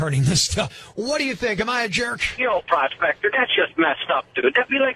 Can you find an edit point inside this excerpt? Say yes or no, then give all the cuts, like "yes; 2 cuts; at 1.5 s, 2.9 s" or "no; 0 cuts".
no; 0 cuts